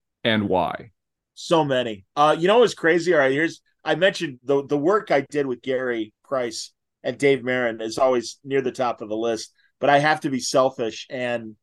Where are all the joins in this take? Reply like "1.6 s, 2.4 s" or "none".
none